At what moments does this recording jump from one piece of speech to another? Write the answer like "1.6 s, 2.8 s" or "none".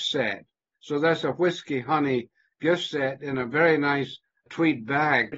4.5 s